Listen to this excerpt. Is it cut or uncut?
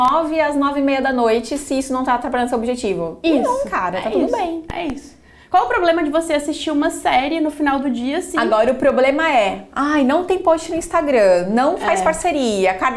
uncut